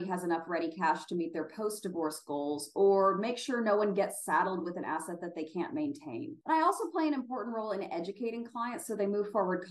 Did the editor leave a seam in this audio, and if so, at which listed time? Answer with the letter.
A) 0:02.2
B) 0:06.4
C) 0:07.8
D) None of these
B